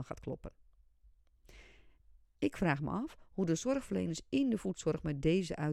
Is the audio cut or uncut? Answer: uncut